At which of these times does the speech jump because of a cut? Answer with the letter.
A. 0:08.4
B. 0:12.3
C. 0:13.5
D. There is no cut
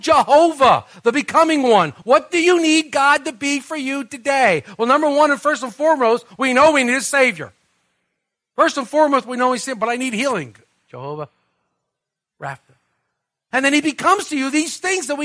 C